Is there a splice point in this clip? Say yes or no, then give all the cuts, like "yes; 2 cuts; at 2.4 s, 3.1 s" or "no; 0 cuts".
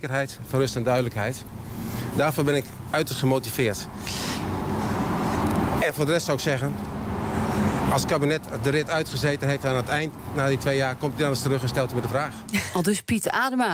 no; 0 cuts